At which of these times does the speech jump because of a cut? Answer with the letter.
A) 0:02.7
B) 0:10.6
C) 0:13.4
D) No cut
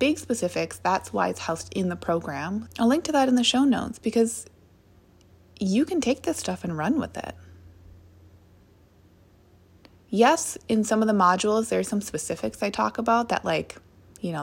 A